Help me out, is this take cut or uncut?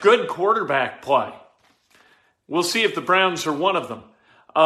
uncut